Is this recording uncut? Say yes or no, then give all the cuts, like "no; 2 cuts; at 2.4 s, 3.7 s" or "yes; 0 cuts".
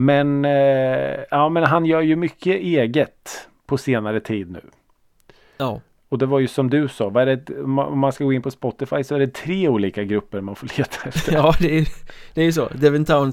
yes; 0 cuts